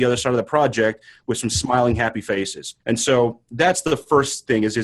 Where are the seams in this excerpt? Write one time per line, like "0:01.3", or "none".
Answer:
0:02.8